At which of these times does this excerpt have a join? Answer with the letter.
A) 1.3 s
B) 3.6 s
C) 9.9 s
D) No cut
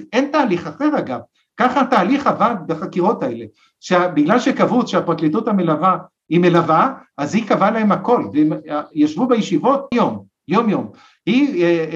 C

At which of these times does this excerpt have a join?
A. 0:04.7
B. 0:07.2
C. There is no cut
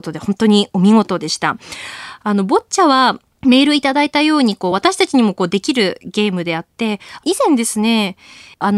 C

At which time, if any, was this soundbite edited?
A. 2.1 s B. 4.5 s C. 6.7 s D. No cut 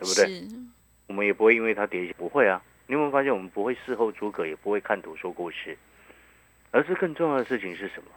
A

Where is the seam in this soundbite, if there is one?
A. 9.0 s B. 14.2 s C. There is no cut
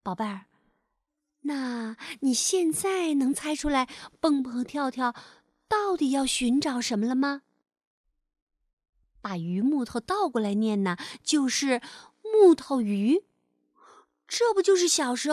C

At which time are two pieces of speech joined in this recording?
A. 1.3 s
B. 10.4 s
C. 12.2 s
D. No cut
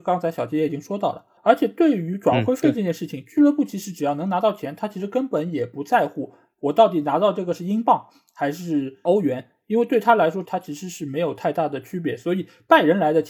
B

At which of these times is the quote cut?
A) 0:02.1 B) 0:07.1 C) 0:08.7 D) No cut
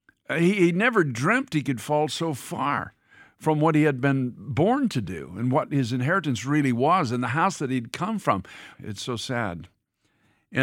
C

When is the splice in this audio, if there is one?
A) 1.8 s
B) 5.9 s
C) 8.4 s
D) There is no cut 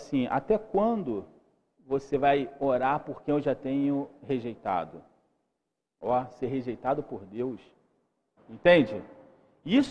C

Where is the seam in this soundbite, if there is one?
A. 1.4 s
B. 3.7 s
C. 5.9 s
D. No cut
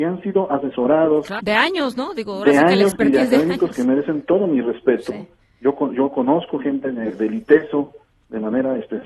A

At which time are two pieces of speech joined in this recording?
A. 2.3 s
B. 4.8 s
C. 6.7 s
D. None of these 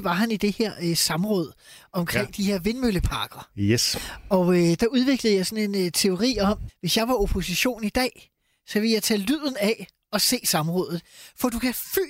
C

